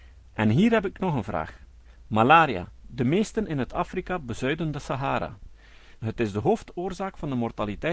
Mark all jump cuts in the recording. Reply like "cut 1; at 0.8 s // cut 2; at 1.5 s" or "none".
cut 1; at 2.8 s // cut 2; at 6.0 s